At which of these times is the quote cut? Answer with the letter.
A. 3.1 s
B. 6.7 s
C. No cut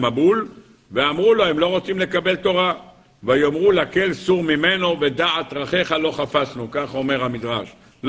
C